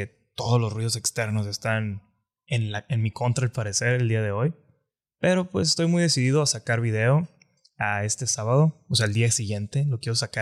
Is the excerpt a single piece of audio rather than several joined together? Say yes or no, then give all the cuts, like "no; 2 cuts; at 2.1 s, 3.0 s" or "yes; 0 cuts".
yes; 0 cuts